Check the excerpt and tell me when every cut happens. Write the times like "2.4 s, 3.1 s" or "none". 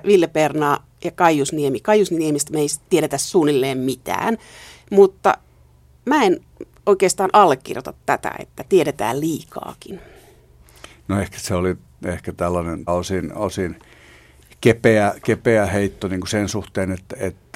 4.7 s, 12.9 s